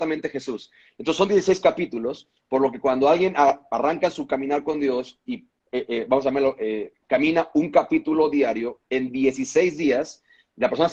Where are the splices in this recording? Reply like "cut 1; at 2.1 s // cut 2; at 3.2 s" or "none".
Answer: none